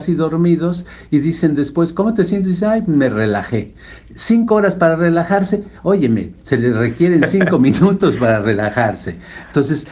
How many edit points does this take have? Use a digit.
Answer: 0